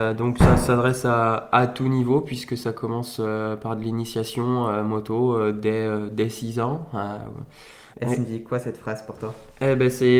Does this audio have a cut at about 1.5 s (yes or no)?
no